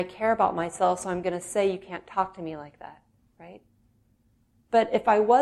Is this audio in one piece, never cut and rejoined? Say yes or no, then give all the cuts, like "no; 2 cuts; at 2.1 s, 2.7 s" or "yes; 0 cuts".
yes; 0 cuts